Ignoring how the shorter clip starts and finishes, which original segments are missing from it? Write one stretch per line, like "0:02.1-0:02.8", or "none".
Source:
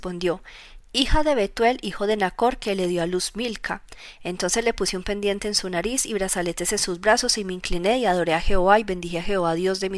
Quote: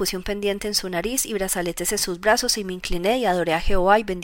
none